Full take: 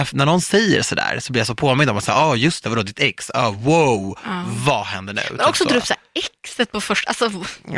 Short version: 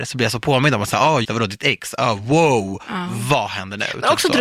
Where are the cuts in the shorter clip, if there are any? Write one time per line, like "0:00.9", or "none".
0:01.2